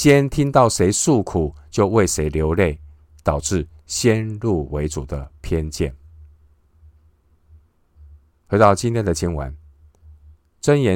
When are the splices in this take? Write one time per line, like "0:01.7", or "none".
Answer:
none